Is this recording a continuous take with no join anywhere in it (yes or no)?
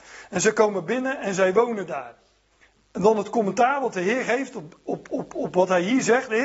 yes